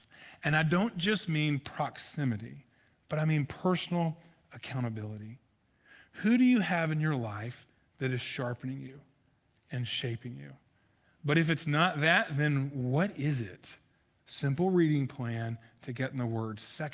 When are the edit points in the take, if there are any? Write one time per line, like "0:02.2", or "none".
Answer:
0:11.0
0:14.2